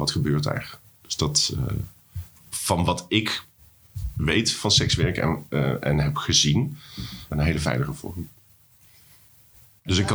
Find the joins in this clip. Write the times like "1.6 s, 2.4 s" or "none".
2.3 s, 7.3 s

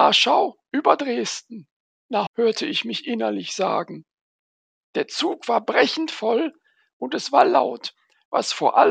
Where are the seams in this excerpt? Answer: 2.3 s

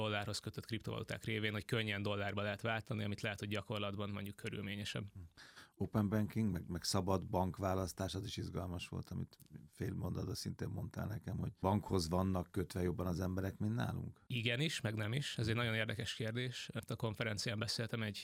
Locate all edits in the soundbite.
none

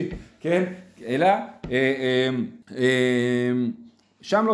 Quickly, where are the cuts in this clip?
2.6 s

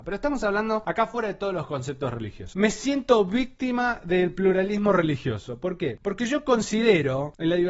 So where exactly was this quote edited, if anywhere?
2.5 s

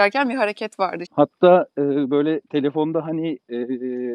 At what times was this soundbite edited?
1.0 s

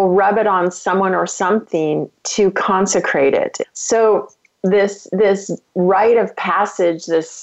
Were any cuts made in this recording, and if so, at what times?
3.6 s

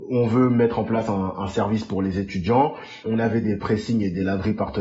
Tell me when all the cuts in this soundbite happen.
3.0 s

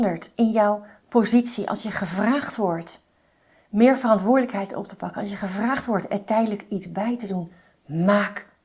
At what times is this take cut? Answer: none

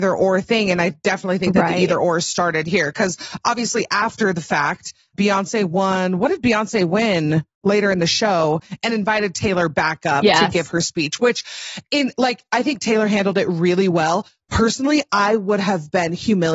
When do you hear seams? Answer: none

